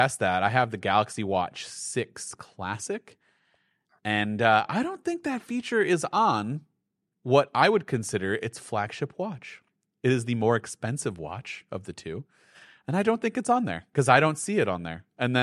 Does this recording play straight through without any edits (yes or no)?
yes